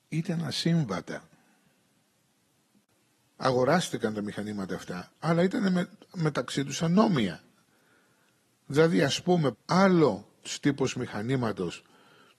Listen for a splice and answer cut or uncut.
cut